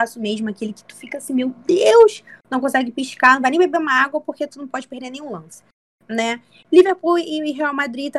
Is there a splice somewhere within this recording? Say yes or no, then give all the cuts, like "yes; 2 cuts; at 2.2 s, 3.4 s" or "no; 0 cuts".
no; 0 cuts